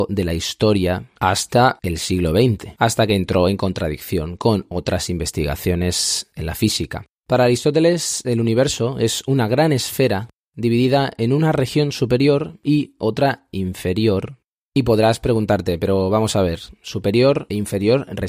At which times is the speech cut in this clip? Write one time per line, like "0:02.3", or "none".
none